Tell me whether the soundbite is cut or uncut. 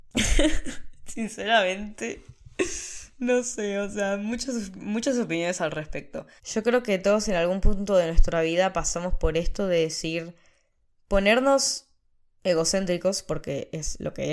cut